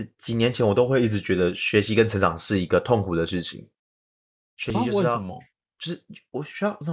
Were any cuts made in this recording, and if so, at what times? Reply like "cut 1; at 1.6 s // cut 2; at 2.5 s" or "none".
none